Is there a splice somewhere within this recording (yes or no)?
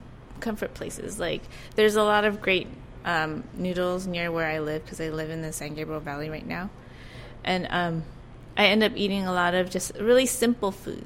no